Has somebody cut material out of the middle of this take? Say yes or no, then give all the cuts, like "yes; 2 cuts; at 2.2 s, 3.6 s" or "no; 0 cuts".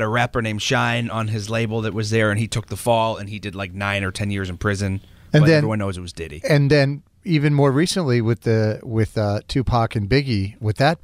no; 0 cuts